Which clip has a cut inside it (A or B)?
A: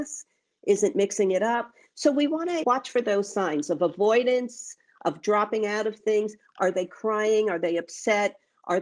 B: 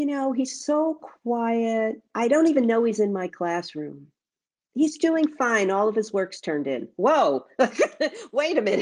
A